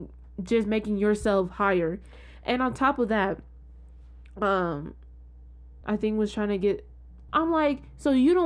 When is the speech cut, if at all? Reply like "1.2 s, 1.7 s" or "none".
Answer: 5.8 s, 7.3 s